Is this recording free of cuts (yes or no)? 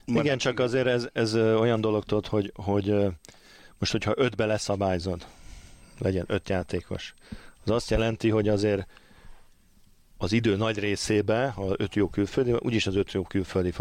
yes